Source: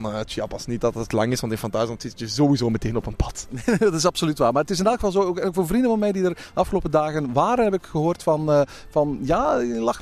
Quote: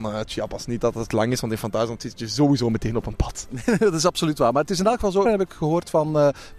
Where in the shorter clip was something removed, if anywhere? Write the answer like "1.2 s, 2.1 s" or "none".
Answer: 5.2 s